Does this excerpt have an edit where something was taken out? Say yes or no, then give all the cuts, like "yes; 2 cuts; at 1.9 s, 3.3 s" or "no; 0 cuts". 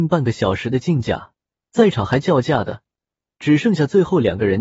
no; 0 cuts